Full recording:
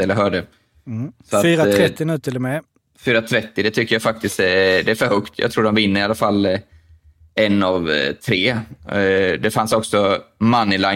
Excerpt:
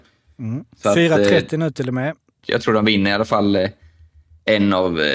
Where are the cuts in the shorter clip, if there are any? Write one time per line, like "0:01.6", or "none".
0:02.4